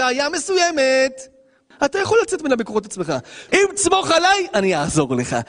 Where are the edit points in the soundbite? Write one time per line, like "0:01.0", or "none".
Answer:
0:01.7
0:03.5